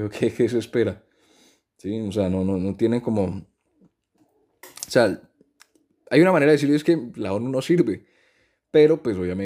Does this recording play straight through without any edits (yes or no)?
yes